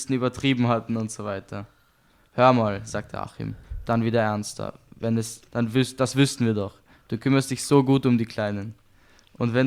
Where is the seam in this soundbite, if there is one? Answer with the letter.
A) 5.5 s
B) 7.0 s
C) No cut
A